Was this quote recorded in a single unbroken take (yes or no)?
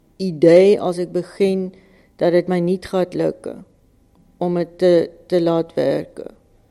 yes